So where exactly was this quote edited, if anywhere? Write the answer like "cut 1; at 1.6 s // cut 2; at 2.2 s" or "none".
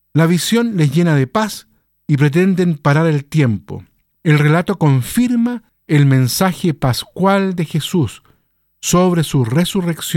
cut 1; at 4.1 s